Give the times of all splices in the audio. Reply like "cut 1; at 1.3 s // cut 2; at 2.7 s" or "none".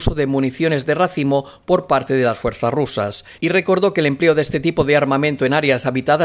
cut 1; at 3.4 s

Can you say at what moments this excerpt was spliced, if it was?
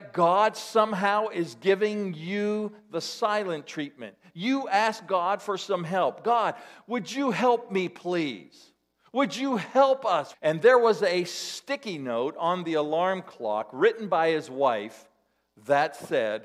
cut 1; at 10.3 s

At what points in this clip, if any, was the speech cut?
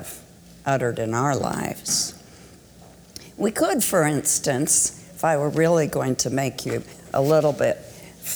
none

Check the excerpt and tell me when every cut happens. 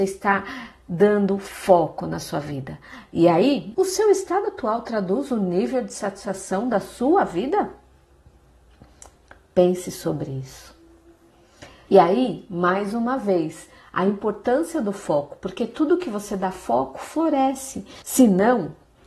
cut 1; at 3.7 s // cut 2; at 11.9 s // cut 3; at 18.0 s

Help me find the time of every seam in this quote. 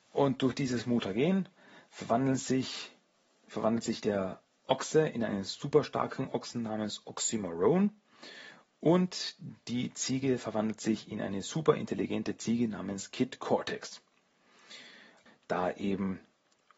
cut 1; at 15.3 s

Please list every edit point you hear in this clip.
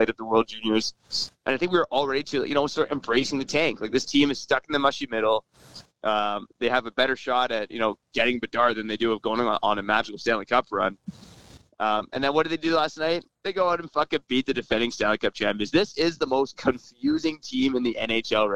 none

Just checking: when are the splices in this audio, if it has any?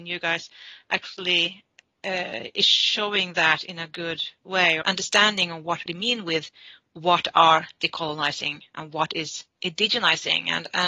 cut 1; at 4.8 s // cut 2; at 5.9 s

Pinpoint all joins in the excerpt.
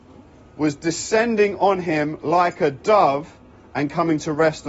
none

